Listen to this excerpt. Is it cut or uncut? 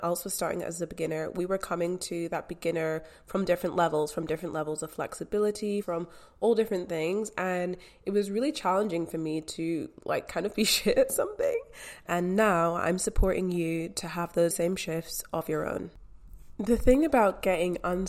cut